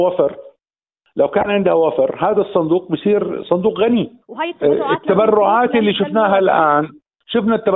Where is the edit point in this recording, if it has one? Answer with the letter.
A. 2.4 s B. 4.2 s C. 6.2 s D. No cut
B